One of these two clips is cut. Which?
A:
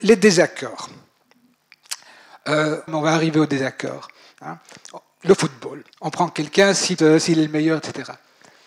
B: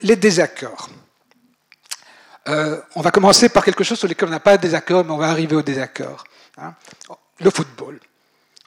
A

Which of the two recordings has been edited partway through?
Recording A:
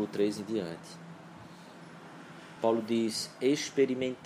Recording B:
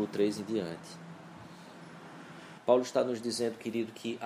B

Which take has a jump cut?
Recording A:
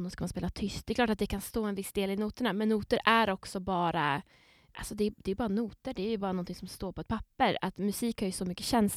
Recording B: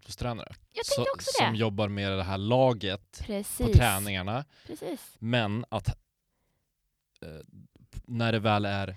B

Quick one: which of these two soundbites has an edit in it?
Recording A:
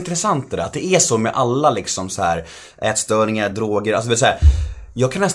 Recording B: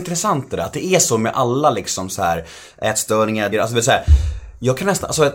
B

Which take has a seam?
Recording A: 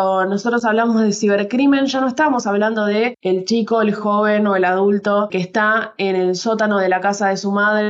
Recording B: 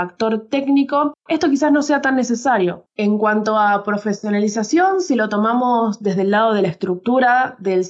B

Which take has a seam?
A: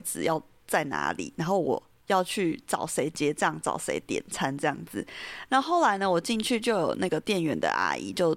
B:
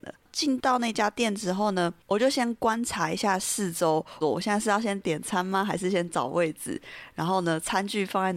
B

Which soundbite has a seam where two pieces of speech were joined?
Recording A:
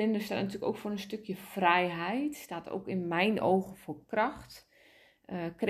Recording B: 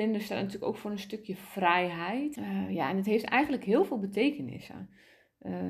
B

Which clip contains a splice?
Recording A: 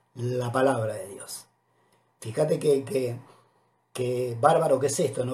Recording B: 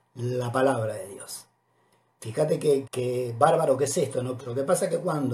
B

